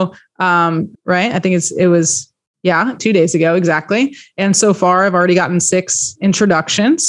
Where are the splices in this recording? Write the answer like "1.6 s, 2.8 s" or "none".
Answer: 0.9 s

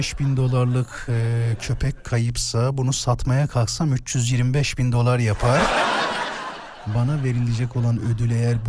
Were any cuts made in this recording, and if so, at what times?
none

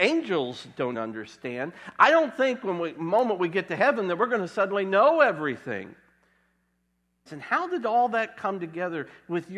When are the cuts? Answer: 0.9 s, 7.3 s

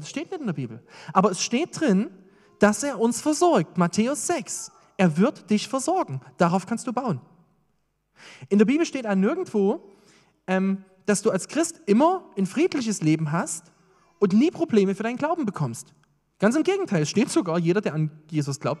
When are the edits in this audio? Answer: none

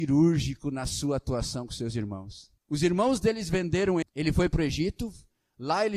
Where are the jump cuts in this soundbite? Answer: 2.6 s, 4.0 s

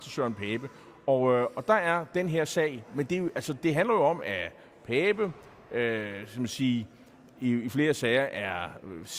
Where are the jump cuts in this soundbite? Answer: none

